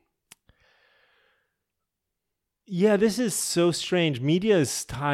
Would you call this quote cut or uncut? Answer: uncut